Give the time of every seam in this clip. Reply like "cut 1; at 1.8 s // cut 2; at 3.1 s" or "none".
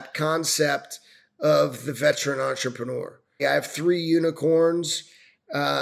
cut 1; at 3.4 s